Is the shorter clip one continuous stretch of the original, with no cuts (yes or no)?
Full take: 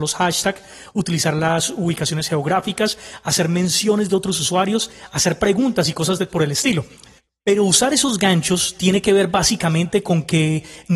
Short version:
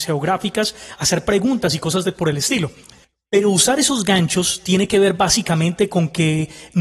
no